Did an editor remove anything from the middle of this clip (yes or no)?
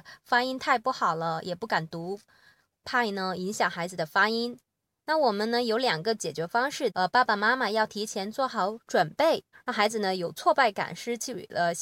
yes